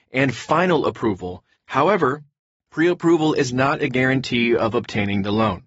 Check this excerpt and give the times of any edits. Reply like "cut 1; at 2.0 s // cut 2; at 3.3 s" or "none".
cut 1; at 1.5 s